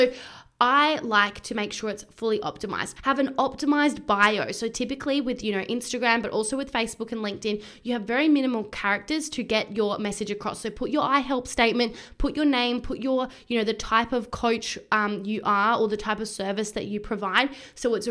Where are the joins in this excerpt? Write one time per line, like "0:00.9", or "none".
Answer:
0:03.0